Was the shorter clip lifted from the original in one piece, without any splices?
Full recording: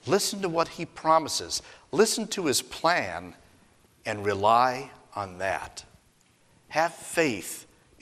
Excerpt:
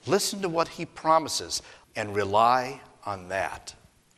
no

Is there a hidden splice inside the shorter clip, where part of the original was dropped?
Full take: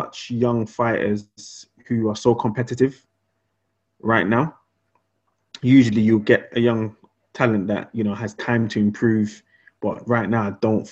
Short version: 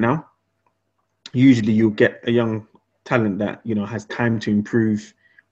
no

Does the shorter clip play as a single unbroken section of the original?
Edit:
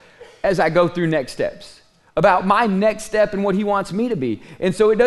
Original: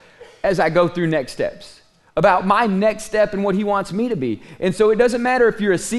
yes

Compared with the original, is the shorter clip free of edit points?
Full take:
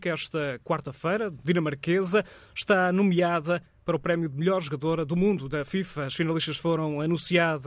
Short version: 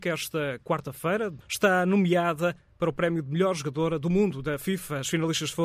no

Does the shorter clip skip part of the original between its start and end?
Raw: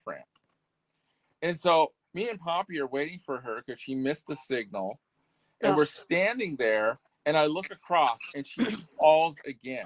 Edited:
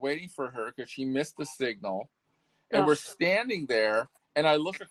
no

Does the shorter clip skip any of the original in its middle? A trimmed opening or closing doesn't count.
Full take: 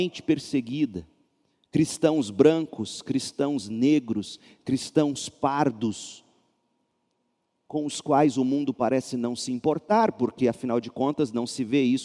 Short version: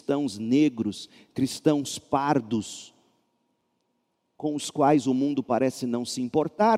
no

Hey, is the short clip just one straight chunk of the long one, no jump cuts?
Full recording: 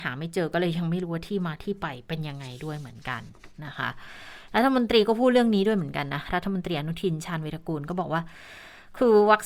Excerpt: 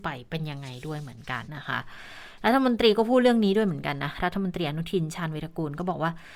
no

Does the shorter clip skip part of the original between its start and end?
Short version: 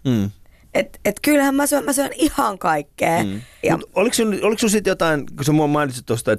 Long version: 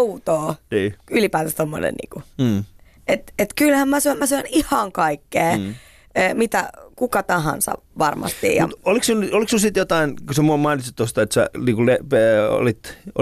yes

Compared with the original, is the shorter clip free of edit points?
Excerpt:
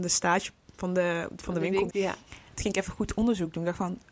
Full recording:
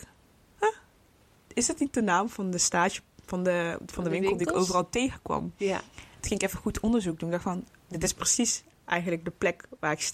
no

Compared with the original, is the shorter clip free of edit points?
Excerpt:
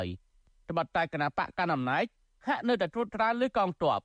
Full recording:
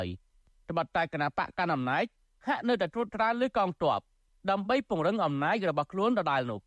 yes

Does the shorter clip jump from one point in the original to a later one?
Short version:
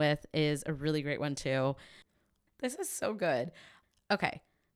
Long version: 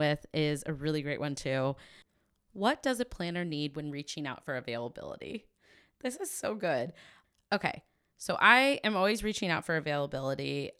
yes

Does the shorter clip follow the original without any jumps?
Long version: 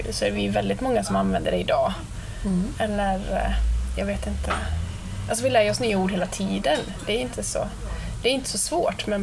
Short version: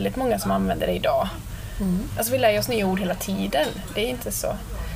no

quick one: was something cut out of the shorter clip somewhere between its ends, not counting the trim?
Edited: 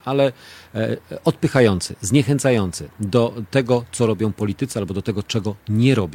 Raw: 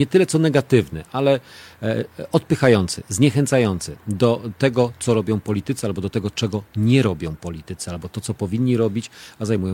no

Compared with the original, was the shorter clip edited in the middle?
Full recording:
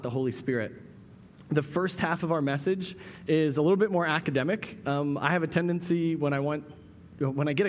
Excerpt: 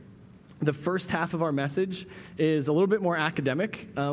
no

